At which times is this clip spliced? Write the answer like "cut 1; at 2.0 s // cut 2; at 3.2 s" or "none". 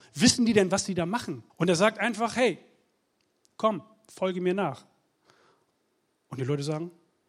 cut 1; at 1.5 s

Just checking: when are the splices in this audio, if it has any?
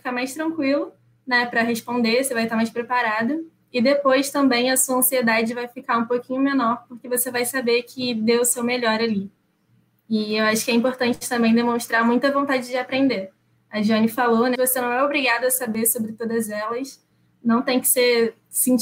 cut 1; at 14.5 s

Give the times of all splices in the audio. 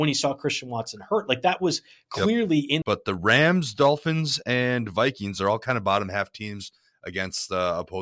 cut 1; at 2.8 s

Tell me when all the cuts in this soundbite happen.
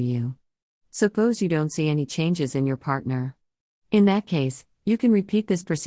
none

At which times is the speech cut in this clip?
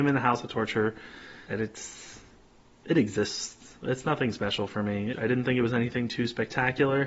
cut 1; at 1.5 s // cut 2; at 5.1 s

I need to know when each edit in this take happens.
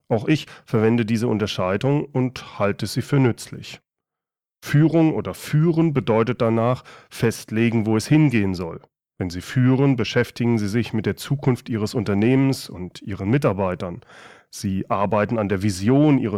none

